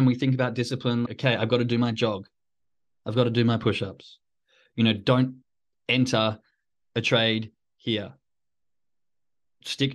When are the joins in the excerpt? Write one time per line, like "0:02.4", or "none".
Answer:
0:01.1